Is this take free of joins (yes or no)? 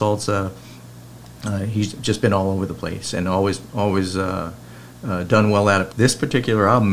no